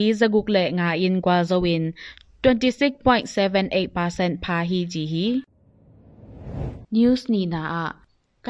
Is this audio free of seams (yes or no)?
no